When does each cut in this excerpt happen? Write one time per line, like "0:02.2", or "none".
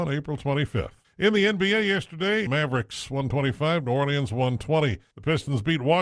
0:02.5